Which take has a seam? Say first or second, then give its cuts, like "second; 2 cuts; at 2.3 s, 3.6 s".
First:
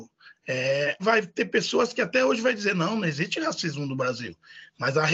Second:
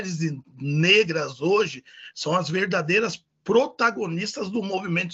first; 1 cut; at 1.0 s